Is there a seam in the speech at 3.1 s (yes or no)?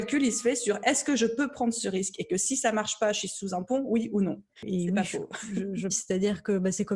no